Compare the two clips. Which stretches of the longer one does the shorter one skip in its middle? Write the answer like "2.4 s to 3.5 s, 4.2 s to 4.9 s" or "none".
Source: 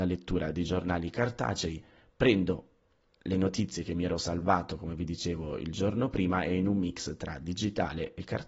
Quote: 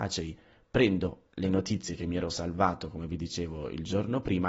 2.7 s to 3.2 s